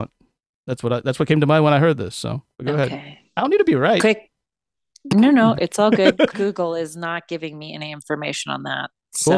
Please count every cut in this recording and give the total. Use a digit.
2